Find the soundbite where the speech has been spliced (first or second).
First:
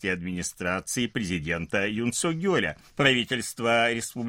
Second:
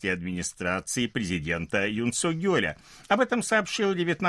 first